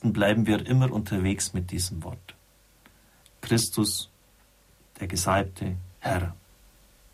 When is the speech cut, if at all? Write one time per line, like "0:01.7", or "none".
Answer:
0:03.2
0:05.9